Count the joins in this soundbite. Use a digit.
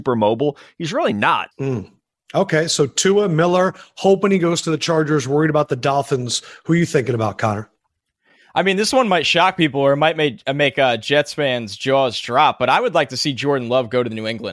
1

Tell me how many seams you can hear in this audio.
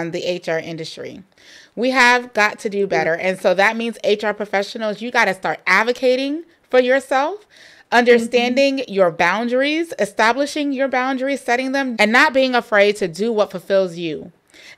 1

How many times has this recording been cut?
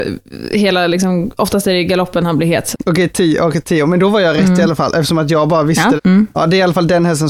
2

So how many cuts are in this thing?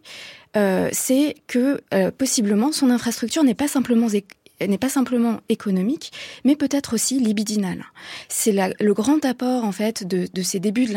0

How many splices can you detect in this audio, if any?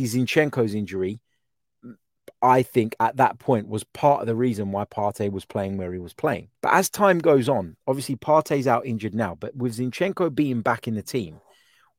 1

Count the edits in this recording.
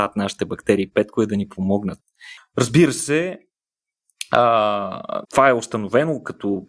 2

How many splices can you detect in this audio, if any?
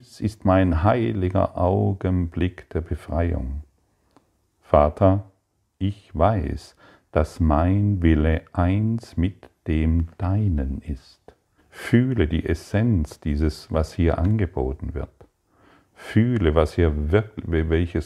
1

